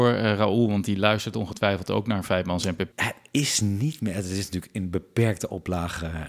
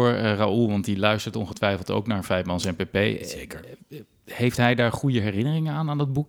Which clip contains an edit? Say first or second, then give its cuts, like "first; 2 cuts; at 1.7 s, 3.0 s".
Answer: first; 1 cut; at 2.9 s